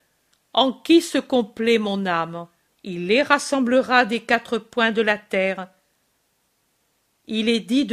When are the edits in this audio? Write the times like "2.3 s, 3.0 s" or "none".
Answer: 2.7 s